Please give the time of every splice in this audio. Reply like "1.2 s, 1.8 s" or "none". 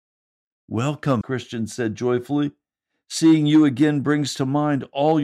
1.2 s